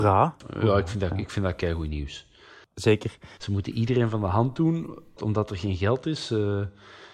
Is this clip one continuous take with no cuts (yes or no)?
no